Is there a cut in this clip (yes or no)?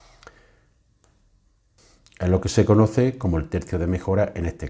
no